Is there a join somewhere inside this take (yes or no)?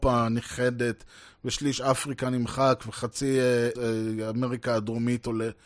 yes